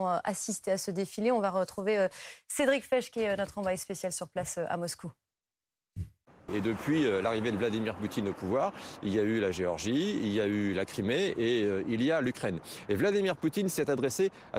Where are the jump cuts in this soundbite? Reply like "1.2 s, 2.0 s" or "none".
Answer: 6.5 s